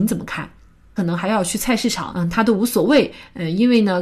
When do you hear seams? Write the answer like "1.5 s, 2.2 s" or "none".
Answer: 1.0 s, 2.1 s